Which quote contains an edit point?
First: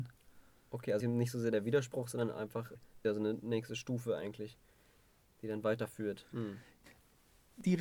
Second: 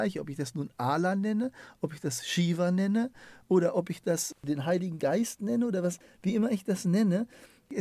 first; 1 cut; at 6.3 s

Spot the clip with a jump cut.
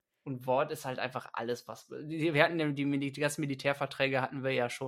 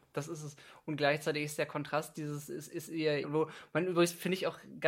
second; 1 cut; at 3.2 s

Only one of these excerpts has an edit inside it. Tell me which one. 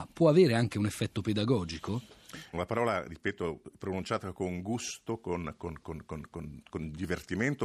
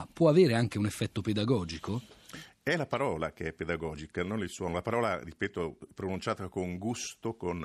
first; 1 cut; at 2.5 s

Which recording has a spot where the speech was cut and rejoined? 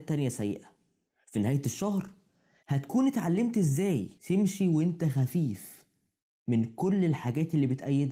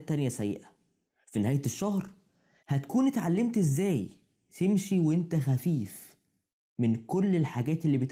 first; 1 cut; at 4.2 s

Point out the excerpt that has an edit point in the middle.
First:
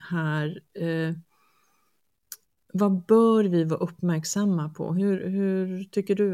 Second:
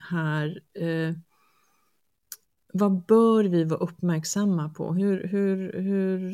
first; 1 cut; at 5.2 s

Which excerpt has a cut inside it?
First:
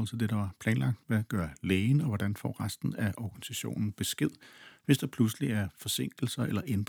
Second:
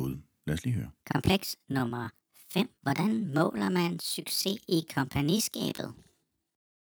second; 2 cuts; at 1.0 s, 2.7 s

